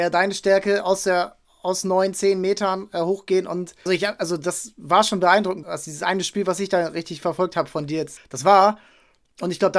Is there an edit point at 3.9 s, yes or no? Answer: yes